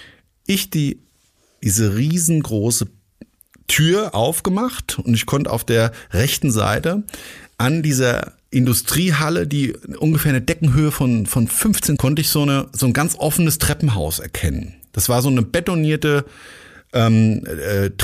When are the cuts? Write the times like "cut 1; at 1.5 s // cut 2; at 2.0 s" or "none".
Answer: cut 1; at 12.0 s